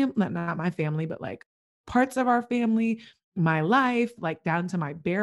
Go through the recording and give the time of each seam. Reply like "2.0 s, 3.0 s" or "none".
4.2 s